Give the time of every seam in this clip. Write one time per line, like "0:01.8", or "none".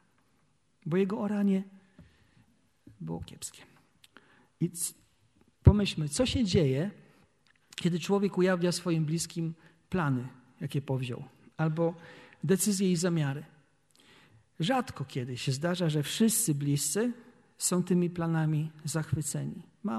none